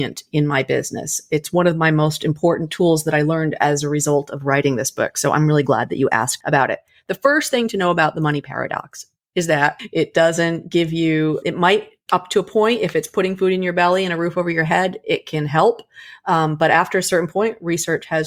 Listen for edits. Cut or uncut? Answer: cut